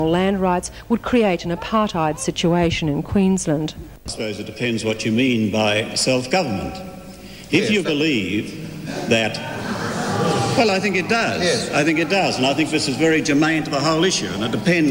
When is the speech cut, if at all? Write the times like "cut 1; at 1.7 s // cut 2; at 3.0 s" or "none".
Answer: none